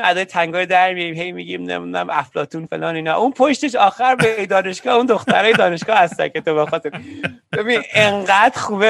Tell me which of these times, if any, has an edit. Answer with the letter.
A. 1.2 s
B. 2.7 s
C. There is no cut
B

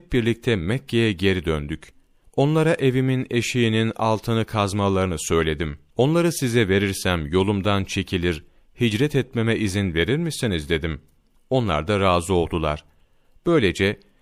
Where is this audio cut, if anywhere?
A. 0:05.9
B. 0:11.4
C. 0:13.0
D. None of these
A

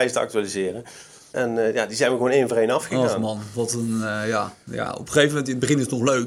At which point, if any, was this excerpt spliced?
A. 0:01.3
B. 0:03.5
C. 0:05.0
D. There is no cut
A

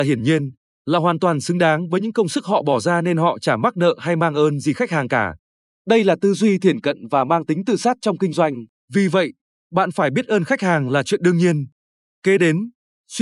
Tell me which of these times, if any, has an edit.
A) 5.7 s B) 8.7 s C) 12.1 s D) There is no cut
B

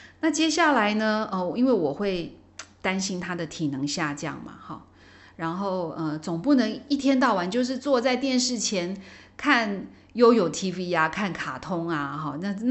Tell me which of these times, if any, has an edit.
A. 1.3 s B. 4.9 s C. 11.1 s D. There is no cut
D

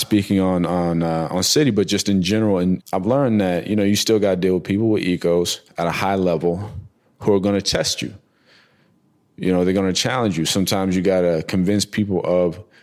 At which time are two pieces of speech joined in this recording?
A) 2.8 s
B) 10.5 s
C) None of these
A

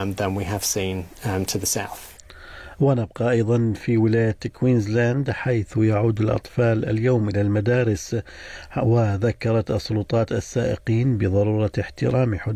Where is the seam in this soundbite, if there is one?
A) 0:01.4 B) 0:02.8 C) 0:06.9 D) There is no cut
D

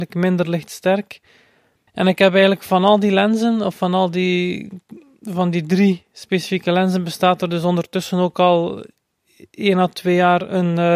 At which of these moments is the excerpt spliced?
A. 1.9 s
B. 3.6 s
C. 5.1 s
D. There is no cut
A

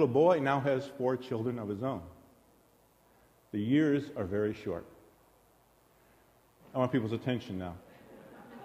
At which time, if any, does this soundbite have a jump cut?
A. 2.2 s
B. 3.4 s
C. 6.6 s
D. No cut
C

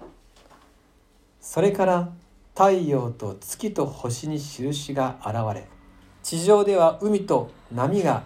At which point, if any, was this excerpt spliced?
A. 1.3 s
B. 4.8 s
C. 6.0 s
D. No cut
D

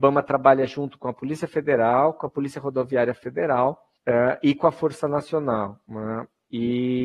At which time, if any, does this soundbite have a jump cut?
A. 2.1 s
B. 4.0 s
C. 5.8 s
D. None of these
B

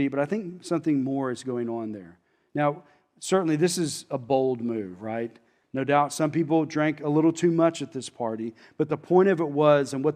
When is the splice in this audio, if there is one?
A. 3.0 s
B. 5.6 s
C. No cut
B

